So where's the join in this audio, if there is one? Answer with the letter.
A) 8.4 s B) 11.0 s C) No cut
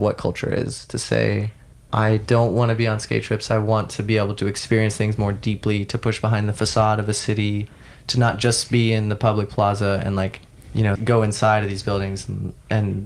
B